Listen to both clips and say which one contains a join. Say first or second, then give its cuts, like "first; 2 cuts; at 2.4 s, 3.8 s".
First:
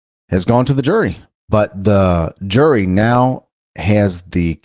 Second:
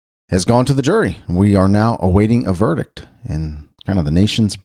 first; 1 cut; at 1.3 s